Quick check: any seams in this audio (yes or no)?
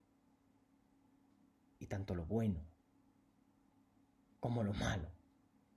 no